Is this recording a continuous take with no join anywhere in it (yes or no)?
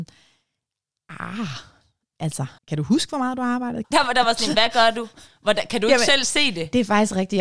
no